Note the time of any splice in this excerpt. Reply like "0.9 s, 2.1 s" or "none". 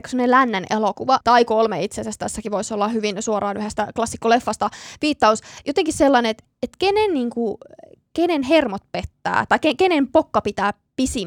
1.2 s